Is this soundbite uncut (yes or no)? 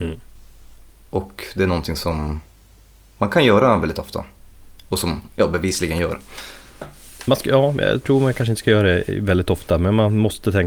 yes